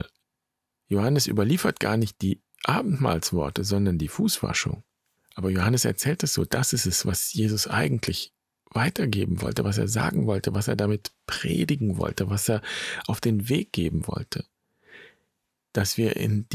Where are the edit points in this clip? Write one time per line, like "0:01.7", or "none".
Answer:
0:05.2